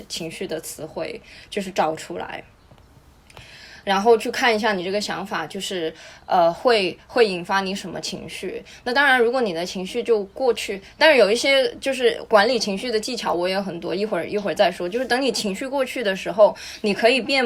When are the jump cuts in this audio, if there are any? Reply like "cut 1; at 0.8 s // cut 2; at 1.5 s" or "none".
none